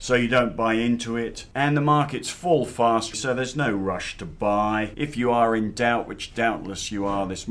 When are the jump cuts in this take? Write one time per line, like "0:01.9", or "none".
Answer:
0:03.1